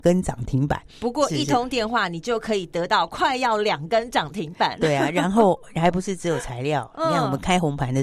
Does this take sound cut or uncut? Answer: uncut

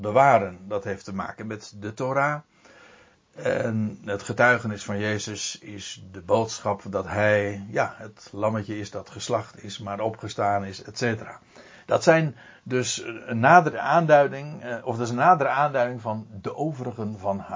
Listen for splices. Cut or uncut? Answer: cut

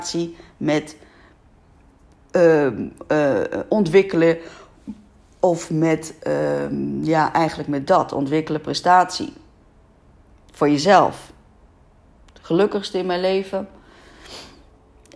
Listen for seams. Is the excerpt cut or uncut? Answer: uncut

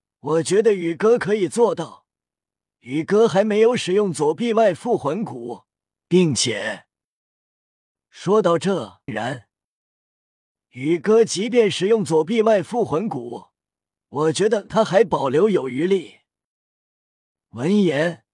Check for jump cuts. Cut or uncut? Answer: cut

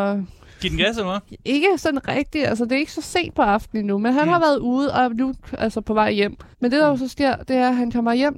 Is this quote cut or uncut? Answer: cut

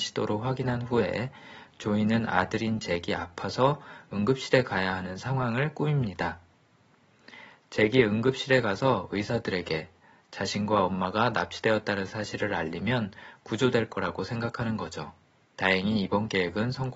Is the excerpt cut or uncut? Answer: cut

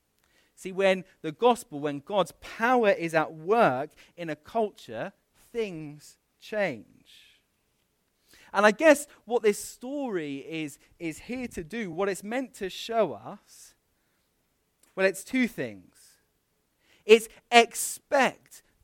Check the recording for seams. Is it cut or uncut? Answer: uncut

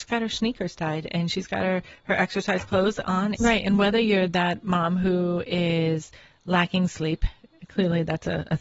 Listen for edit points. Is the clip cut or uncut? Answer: cut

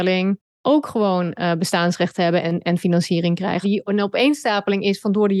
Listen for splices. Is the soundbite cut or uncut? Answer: cut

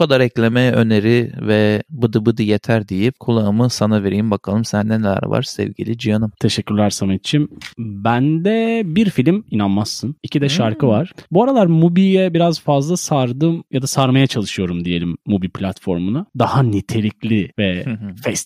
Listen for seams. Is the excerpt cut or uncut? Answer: uncut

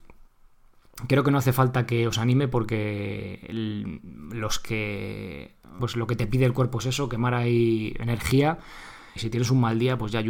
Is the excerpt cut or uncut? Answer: cut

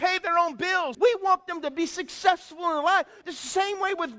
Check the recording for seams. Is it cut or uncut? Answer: cut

